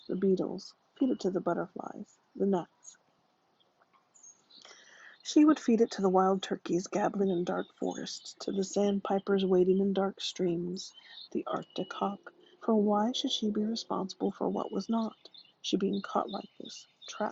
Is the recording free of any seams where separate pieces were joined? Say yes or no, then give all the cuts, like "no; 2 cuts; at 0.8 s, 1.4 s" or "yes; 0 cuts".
no; 3 cuts; at 11.3 s, 12.6 s, 15.5 s